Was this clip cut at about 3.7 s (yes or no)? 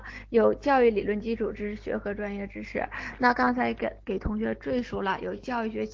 no